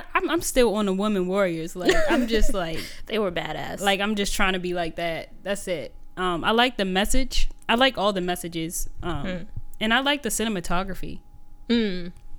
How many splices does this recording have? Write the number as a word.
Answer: zero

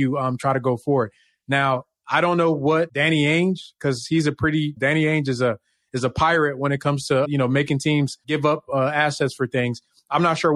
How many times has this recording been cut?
two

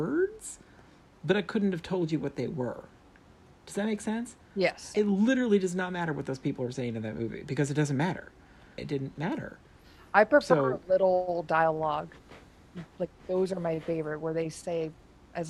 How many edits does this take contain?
two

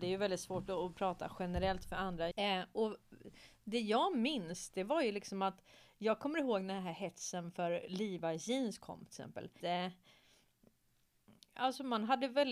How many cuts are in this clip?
two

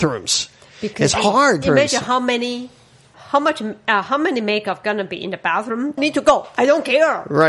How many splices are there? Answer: three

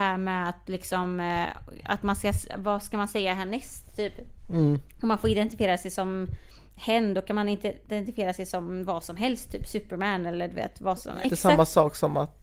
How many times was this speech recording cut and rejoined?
two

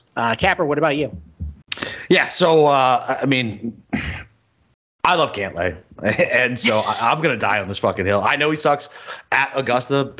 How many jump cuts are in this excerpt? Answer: zero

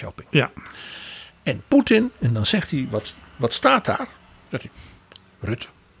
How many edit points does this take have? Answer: zero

